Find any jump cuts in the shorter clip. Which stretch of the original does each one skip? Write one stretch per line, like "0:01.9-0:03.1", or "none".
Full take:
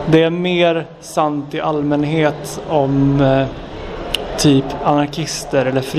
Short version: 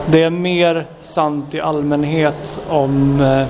none

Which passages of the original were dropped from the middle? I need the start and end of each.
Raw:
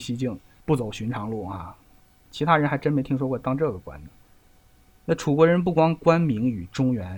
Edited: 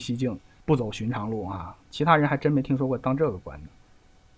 0:01.8-0:02.2

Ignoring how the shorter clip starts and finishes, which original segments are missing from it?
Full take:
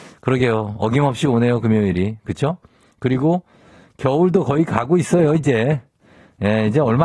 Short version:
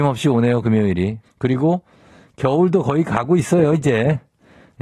0:02.2-0:02.8

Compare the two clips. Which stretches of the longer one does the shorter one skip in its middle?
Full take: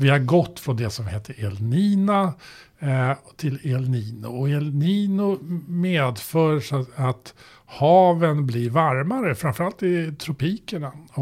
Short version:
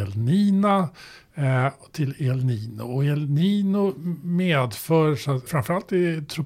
0:06.9-0:09.4

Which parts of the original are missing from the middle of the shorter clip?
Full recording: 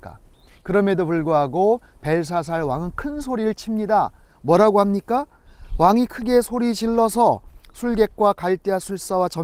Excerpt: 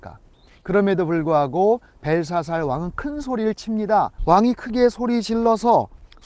0:04.2-0:05.7

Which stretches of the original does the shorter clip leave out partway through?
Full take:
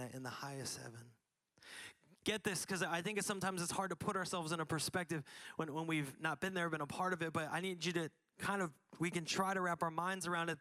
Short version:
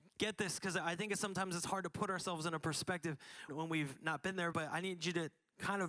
0:05.5-0:05.7
0:06.7-0:07.3

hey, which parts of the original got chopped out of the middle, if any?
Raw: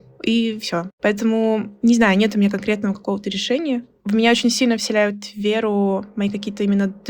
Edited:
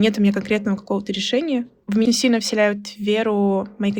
0:04.2-0:04.4

